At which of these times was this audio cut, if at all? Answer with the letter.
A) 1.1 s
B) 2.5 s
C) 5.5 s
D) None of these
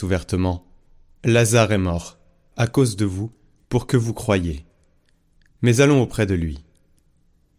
B